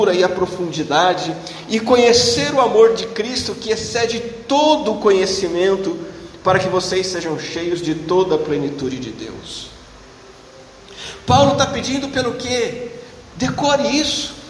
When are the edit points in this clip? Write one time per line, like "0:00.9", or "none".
0:13.2